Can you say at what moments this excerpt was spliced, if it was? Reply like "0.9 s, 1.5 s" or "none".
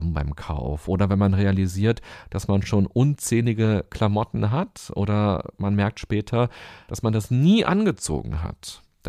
none